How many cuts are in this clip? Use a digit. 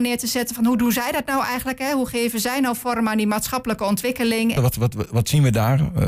1